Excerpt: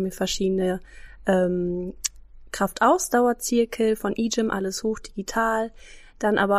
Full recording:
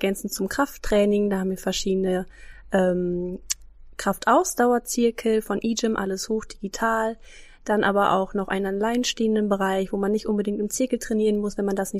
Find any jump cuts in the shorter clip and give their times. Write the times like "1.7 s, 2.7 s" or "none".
none